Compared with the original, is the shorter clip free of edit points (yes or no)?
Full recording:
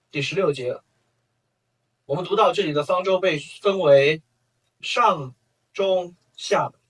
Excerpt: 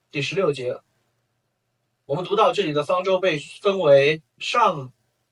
no